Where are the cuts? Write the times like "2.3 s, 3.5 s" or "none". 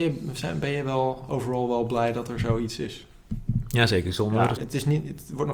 4.6 s